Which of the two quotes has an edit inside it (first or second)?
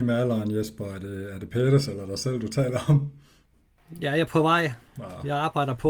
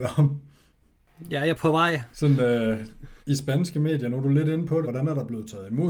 second